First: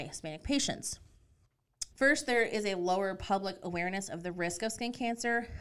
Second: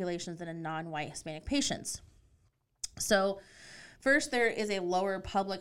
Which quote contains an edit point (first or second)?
first